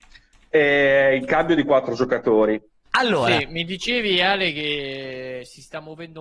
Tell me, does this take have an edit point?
yes; 1 cut; at 2.9 s

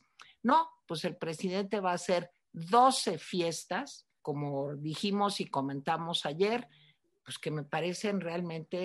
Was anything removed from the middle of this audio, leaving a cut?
yes; 1 cut; at 4.2 s

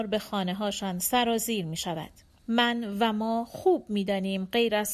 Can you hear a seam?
yes; 1 cut; at 2.4 s

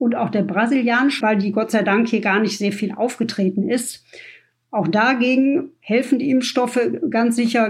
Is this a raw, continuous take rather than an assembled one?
no; 1 cut; at 1.2 s

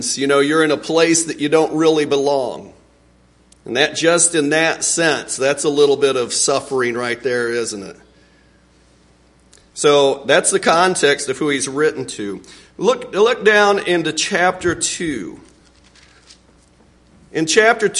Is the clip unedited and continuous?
yes; 0 cuts

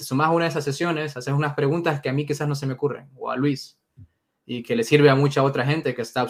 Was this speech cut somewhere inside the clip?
no; 0 cuts

